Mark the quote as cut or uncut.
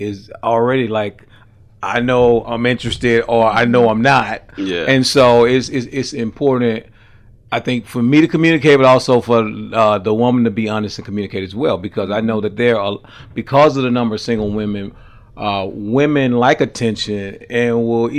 uncut